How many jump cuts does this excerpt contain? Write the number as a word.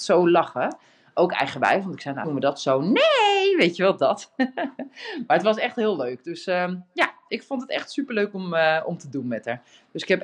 one